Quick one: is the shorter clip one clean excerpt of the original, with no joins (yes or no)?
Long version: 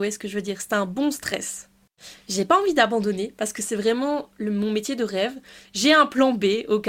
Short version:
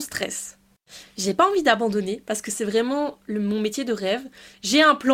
yes